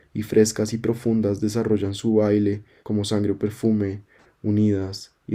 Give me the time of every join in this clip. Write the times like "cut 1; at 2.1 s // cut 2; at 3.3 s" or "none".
cut 1; at 2.8 s // cut 2; at 4.3 s